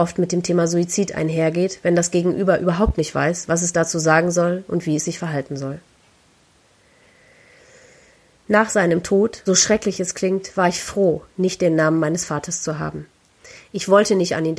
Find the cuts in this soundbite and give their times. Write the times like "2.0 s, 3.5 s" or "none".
9.5 s